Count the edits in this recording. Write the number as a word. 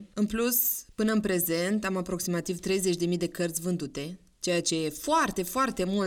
zero